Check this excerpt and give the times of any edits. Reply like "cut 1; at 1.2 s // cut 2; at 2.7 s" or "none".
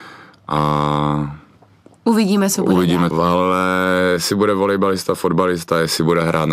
cut 1; at 3.1 s